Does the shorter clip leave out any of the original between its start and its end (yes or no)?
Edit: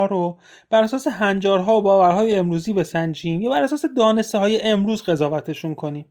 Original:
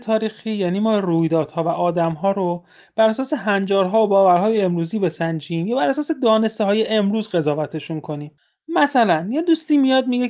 no